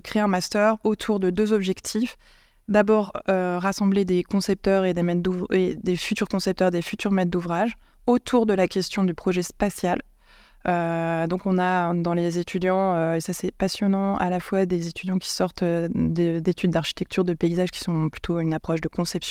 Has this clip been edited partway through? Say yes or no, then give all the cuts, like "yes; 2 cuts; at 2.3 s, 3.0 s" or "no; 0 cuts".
no; 0 cuts